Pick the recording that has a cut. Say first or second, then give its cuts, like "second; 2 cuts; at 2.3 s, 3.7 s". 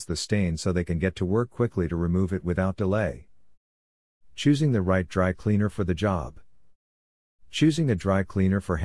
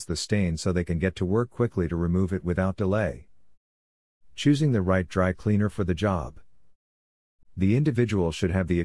second; 1 cut; at 7.4 s